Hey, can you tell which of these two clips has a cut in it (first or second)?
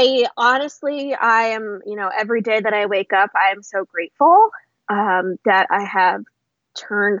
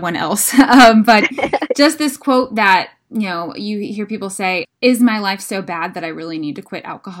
second